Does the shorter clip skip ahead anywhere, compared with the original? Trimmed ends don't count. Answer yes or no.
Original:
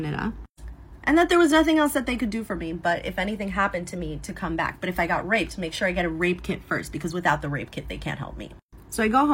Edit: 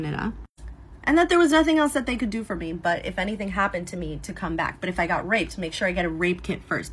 no